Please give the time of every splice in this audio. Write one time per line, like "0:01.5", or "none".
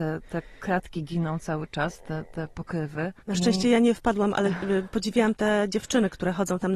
0:03.2